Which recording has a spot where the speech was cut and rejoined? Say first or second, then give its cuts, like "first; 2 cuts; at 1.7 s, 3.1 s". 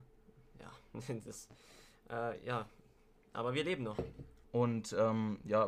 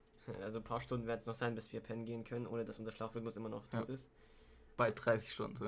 first; 1 cut; at 4.4 s